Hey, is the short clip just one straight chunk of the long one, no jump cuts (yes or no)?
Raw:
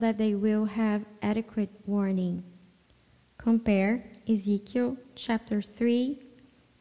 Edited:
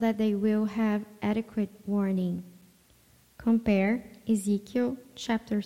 yes